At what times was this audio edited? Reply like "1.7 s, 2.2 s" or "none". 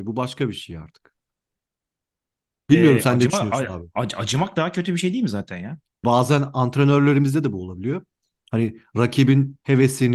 6.0 s